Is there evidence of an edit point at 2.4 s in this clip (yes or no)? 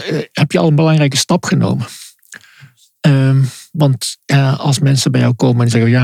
no